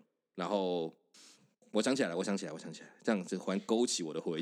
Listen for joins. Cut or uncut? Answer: uncut